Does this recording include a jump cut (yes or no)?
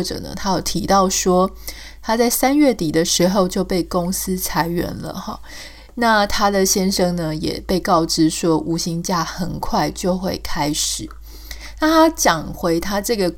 no